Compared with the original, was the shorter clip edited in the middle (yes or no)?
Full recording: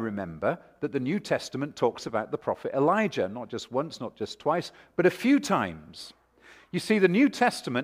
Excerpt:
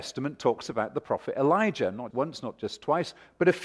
yes